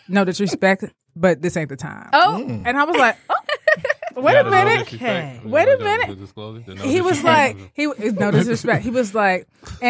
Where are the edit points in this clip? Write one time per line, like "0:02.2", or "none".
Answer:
none